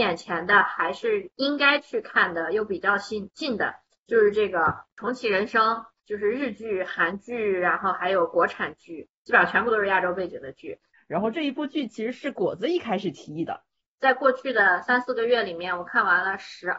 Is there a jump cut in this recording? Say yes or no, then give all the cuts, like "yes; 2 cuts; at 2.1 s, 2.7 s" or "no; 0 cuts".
yes; 3 cuts; at 6.0 s, 10.9 s, 13.9 s